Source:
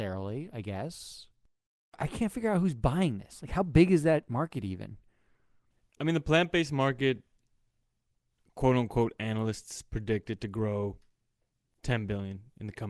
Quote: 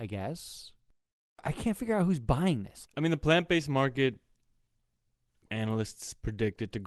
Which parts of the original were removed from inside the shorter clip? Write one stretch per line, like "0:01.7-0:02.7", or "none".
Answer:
0:03.4-0:05.9
0:08.5-0:09.2